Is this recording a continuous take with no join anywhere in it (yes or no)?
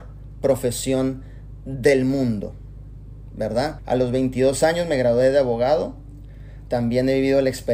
no